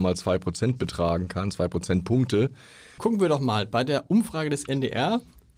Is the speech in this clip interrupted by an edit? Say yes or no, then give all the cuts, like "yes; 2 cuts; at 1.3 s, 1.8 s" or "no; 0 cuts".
yes; 1 cut; at 3.0 s